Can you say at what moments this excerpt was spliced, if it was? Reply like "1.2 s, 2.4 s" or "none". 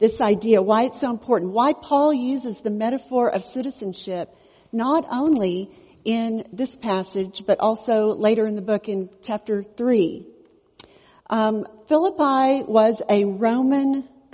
none